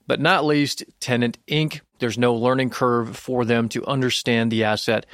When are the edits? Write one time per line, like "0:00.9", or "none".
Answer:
0:02.0